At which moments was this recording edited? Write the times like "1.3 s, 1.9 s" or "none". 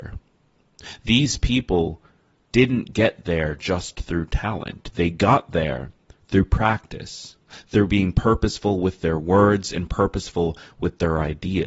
none